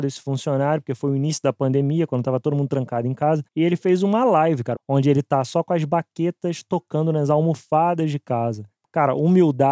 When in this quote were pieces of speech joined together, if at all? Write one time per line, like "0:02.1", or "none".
0:03.5
0:04.7